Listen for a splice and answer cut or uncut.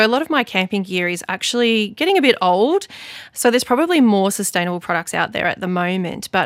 uncut